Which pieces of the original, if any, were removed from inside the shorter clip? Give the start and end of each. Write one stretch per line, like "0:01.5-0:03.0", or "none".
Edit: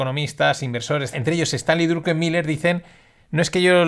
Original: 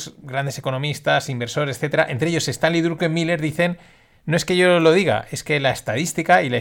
0:01.8-0:02.1